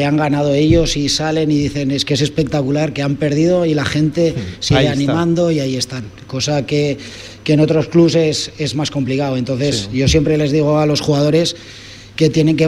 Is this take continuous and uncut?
yes; 0 cuts

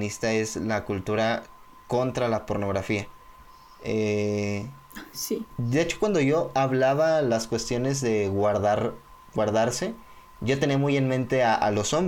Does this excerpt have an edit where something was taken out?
no; 0 cuts

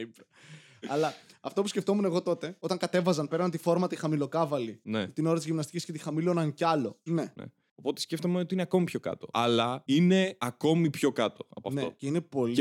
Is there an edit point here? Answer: yes; 1 cut; at 7.1 s

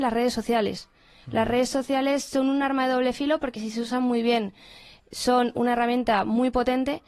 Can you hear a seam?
no; 0 cuts

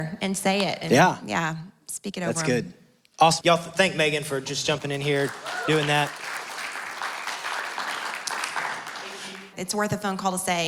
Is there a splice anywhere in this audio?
yes; 2 cuts; at 3.4 s, 9.5 s

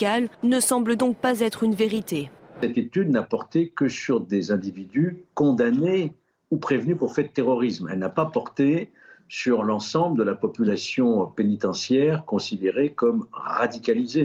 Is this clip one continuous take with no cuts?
yes; 0 cuts

